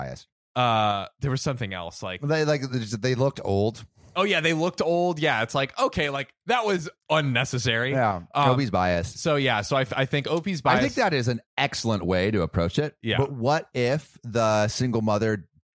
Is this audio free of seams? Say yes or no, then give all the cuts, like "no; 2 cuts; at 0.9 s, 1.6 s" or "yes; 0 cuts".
yes; 0 cuts